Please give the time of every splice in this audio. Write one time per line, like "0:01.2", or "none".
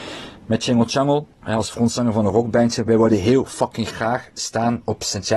0:01.3